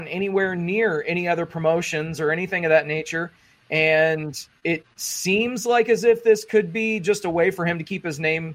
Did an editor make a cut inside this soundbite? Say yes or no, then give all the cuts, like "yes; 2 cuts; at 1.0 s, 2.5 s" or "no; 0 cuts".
no; 0 cuts